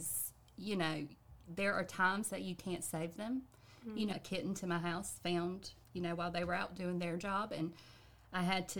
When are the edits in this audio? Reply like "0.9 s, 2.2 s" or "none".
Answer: 4.1 s, 5.8 s